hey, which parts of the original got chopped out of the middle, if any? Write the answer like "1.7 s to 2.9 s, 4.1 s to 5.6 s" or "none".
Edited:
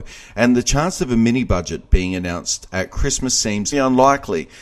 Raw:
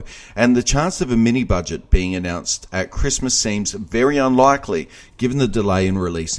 3.7 s to 4.1 s